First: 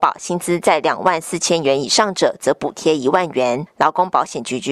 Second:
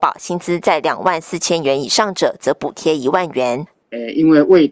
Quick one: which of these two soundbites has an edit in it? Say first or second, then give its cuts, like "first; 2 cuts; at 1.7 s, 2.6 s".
second; 1 cut; at 3.7 s